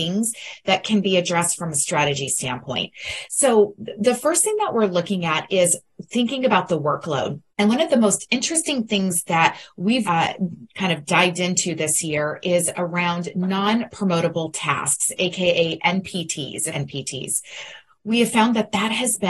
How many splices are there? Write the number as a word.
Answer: three